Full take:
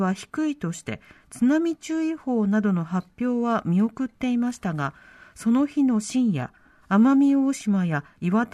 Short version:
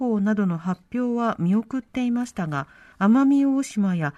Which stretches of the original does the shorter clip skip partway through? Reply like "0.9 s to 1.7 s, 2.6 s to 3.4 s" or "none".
5.2 s to 6.8 s

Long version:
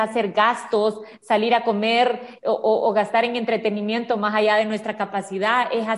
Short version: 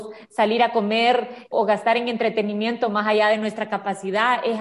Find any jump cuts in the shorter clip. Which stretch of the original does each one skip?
2.4 s to 2.8 s

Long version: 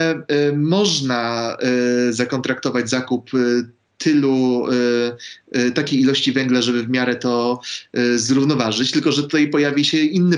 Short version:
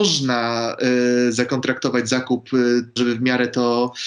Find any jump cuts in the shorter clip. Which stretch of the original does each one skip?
3.8 s to 6.6 s

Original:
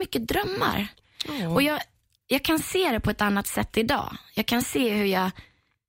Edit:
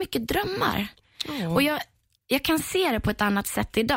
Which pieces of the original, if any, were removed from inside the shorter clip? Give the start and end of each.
none

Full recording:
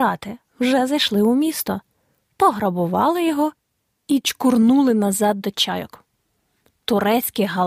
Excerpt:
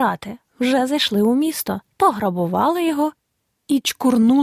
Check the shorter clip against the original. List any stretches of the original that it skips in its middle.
1.9 s to 2.3 s

